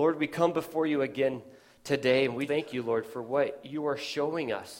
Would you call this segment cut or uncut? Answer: cut